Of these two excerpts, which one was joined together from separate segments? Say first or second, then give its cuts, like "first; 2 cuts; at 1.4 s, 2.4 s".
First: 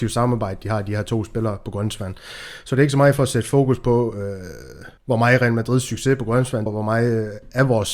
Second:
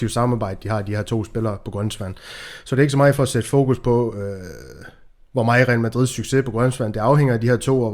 first; 2 cuts; at 5.0 s, 6.7 s